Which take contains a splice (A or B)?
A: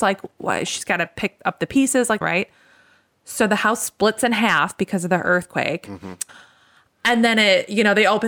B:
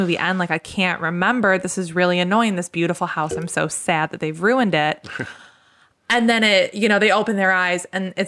A